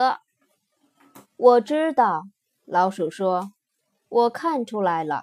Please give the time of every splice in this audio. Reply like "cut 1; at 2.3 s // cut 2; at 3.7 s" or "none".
cut 1; at 1.2 s